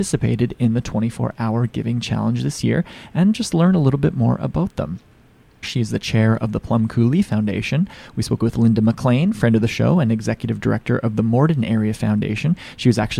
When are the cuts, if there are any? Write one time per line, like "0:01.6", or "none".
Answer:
0:05.6